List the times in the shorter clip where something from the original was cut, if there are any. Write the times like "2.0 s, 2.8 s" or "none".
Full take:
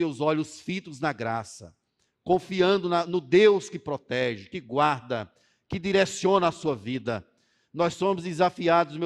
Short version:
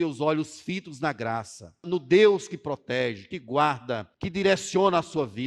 1.8 s, 4.1 s